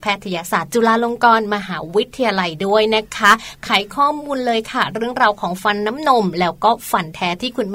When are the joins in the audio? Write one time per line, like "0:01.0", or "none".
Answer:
none